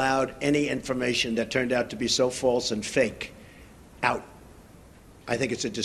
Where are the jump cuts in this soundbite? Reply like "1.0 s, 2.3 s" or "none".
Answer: none